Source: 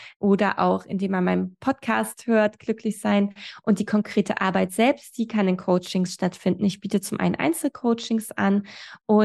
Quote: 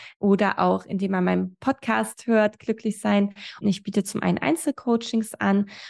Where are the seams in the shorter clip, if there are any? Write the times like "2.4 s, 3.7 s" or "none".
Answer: 3.6 s